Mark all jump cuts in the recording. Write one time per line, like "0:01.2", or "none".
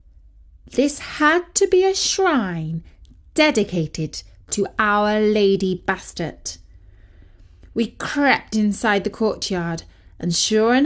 none